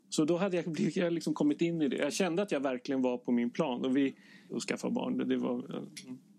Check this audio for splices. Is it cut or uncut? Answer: cut